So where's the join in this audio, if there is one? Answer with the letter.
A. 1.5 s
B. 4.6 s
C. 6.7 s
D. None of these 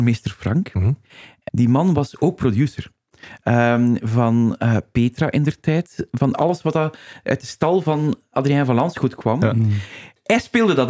A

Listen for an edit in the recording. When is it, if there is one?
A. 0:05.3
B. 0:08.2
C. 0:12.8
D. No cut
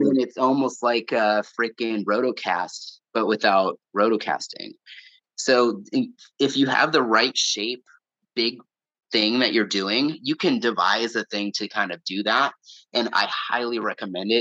D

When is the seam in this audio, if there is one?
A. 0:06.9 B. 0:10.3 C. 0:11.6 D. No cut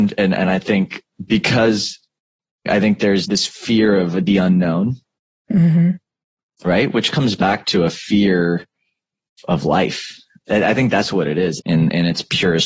C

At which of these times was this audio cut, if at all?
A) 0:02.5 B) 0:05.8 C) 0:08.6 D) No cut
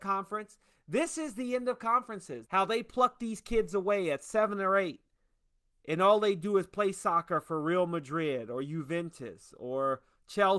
A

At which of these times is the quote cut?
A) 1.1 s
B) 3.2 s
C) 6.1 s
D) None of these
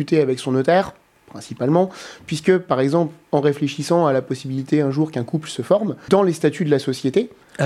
C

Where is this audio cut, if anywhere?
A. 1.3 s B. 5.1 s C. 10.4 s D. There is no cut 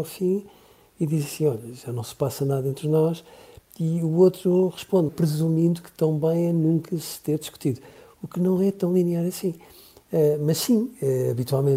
B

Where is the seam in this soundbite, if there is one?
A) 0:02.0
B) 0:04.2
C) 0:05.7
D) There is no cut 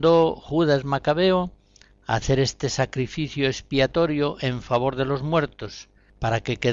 D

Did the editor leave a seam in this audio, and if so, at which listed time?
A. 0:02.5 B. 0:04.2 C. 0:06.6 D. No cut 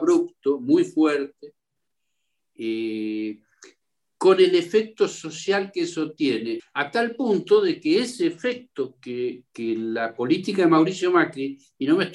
C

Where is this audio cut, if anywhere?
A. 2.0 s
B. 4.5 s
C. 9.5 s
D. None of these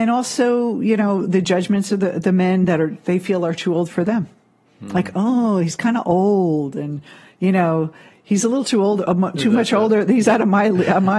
D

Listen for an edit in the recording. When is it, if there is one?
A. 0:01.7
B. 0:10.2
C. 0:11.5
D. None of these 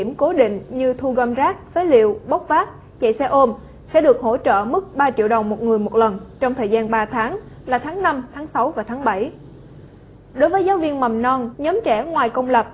C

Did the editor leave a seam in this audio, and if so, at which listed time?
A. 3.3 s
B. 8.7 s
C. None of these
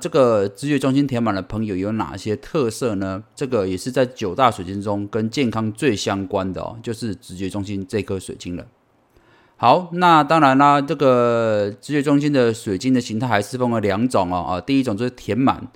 A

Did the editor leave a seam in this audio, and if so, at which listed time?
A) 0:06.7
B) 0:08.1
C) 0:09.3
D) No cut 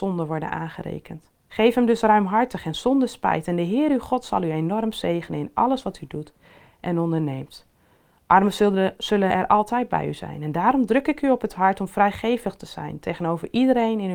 D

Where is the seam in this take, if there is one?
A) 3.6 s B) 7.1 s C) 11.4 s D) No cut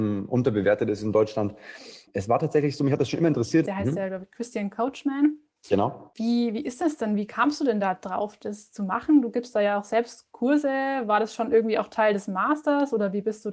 A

